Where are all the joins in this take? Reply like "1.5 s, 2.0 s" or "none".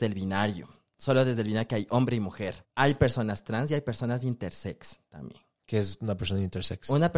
2.6 s